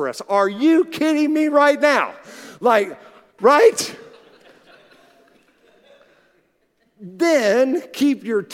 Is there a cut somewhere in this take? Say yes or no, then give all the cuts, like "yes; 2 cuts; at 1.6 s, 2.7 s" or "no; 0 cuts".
yes; 1 cut; at 3.4 s